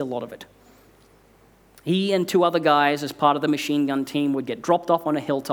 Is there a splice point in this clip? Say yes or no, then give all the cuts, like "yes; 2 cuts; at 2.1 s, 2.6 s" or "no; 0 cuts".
no; 0 cuts